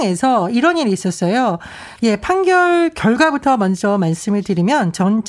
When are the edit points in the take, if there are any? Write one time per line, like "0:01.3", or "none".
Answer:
0:02.0